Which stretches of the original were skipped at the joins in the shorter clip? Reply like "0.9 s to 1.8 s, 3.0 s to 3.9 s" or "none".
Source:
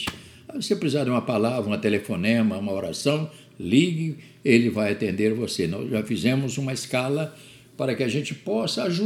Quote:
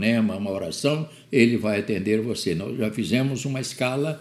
3.5 s to 4.4 s